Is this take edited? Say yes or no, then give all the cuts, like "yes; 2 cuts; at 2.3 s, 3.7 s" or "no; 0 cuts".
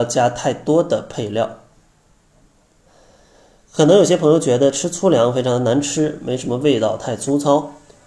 no; 0 cuts